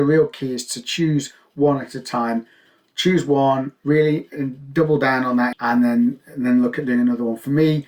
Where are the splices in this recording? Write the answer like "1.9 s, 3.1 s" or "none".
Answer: 5.5 s